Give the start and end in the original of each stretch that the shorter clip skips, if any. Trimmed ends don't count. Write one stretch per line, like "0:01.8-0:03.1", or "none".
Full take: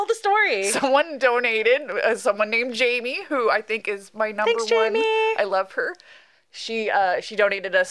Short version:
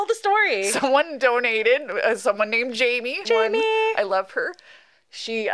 0:03.2-0:04.7